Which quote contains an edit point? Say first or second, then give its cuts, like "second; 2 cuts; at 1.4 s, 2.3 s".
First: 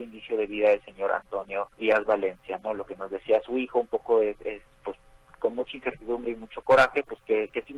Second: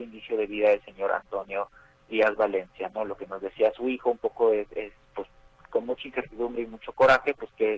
first; 1 cut; at 1.7 s